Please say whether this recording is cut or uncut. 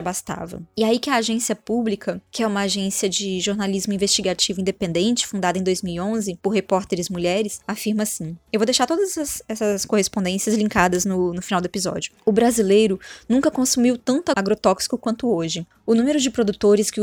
uncut